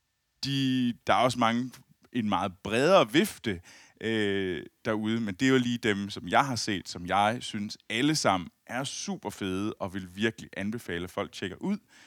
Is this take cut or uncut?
uncut